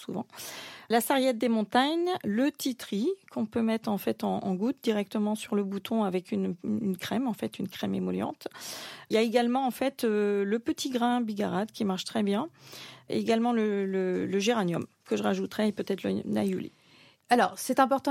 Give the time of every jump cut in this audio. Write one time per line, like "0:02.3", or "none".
0:14.9